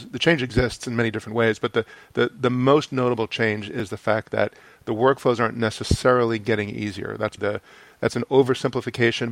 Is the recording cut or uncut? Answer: cut